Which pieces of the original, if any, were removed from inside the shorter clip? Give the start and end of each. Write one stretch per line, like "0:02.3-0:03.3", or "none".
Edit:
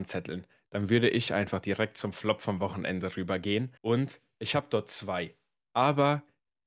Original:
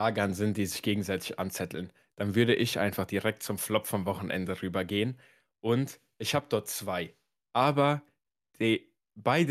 0:05.2-0:05.6